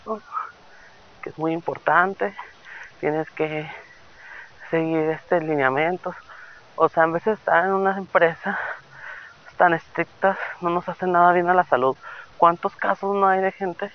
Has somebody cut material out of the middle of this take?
no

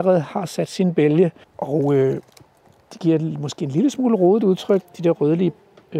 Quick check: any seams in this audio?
yes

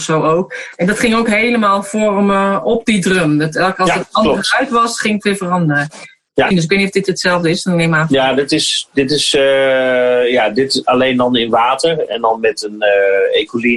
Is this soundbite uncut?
no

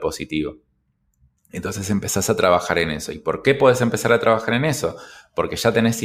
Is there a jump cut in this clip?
no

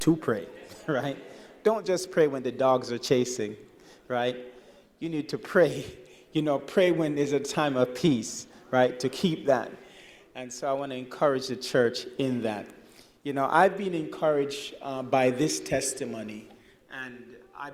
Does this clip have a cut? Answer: no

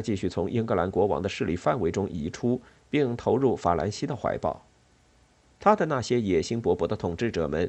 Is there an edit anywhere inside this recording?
yes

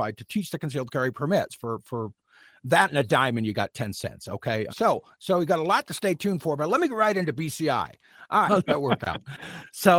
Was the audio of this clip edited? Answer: yes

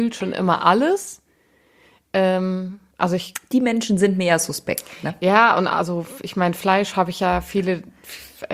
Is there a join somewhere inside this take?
no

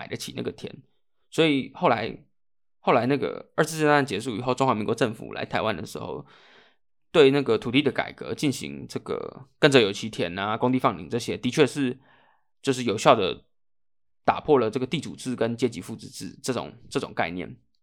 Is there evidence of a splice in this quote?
no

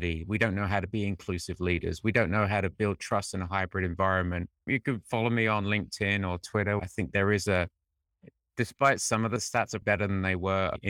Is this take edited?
yes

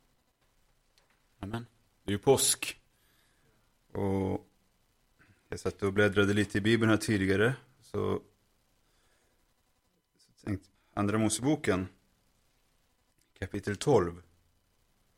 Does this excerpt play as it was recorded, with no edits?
no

